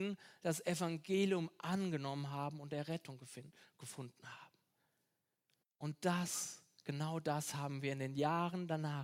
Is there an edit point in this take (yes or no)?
yes